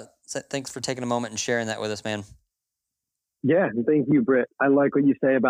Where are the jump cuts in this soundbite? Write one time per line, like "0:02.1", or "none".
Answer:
0:04.5